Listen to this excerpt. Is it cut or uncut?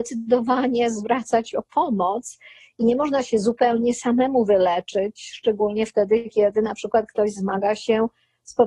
uncut